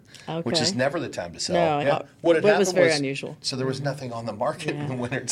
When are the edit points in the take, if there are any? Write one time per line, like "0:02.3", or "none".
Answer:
0:01.8
0:03.4

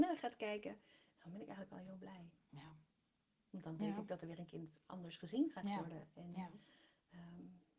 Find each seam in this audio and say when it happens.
none

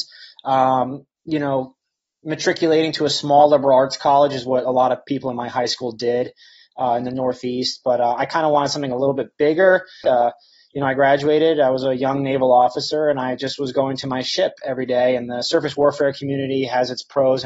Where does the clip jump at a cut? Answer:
0:10.0

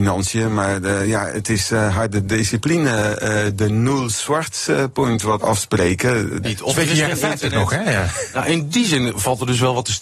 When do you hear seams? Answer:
0:05.4
0:06.5

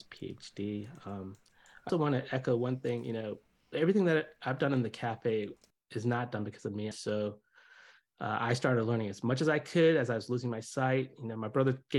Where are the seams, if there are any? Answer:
0:01.9
0:06.9

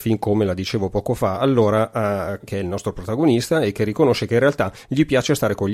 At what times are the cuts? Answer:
0:02.4

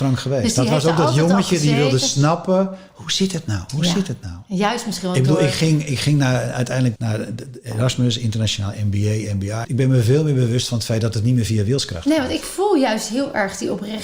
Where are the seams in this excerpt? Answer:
0:07.0
0:09.6

